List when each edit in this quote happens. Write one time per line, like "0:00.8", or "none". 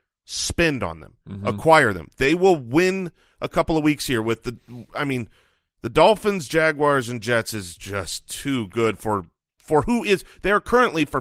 none